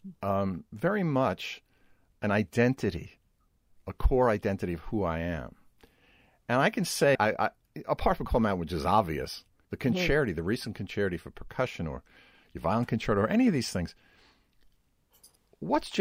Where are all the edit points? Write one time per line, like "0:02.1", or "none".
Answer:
0:07.1
0:09.6